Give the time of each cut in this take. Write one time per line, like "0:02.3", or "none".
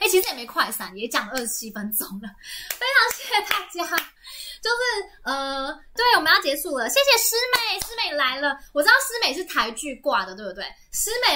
0:06.0